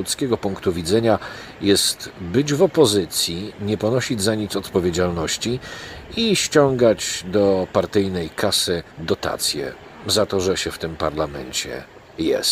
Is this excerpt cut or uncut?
cut